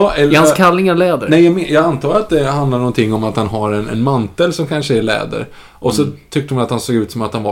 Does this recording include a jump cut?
no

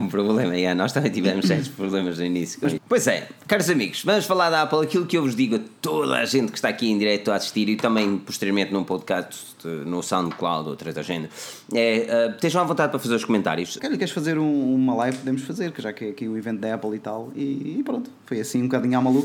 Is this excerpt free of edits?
no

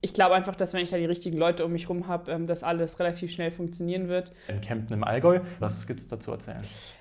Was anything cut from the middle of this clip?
yes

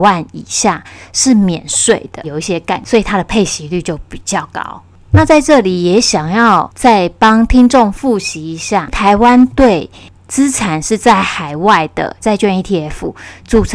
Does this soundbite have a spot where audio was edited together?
yes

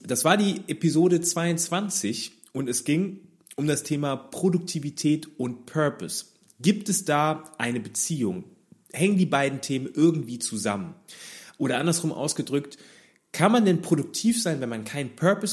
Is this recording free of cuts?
yes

